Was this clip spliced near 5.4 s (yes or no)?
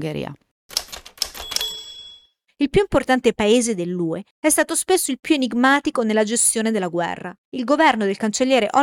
no